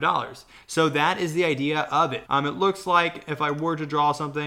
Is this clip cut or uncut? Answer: cut